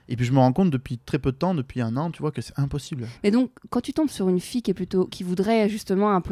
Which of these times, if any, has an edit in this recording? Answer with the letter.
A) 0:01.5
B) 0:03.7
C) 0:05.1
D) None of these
D